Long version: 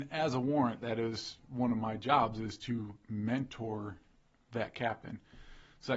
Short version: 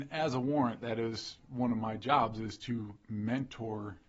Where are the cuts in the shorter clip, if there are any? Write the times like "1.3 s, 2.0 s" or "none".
none